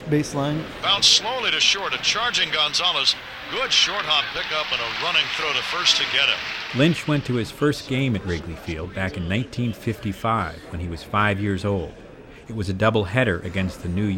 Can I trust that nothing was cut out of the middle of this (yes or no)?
yes